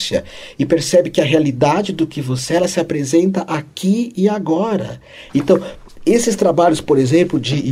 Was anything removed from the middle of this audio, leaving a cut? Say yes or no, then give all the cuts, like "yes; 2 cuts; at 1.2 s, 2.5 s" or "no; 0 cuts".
yes; 1 cut; at 5.3 s